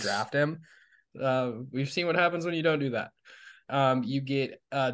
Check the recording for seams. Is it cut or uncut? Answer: cut